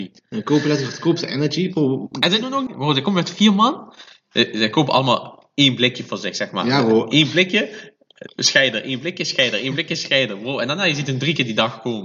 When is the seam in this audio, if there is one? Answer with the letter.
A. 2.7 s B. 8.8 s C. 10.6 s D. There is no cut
A